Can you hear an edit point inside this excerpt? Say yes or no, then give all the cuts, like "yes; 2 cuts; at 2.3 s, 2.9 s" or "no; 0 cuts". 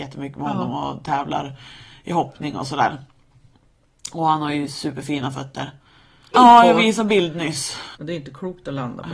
yes; 2 cuts; at 6.3 s, 7.9 s